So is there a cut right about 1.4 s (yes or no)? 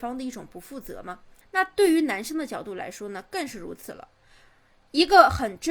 yes